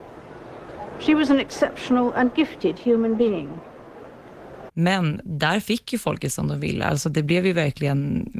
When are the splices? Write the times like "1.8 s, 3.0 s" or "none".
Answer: 4.7 s